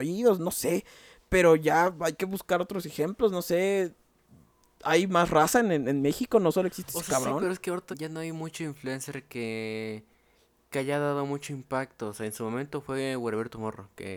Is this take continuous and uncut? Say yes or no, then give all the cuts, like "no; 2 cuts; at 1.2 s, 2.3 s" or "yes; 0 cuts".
no; 1 cut; at 7.9 s